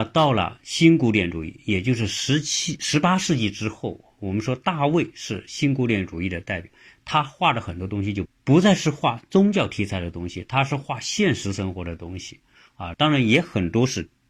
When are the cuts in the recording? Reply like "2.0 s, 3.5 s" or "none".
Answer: 8.2 s, 12.9 s